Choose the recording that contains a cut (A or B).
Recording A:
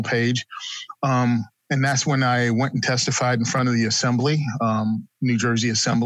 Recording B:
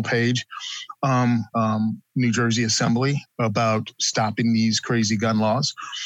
B